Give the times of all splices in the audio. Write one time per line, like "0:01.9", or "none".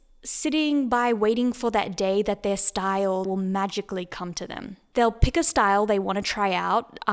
0:03.3
0:04.9